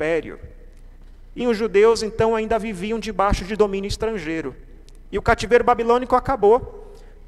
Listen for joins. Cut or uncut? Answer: cut